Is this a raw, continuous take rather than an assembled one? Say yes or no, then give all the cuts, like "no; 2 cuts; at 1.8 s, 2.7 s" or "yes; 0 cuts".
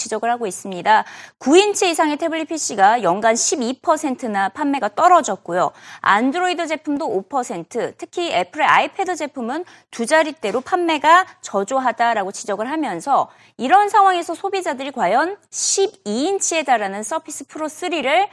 yes; 0 cuts